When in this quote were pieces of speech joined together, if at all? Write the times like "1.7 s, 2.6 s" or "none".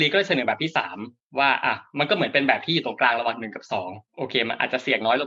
4.1 s